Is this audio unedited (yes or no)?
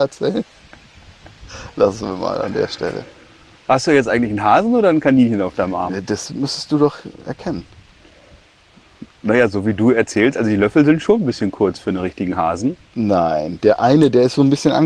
yes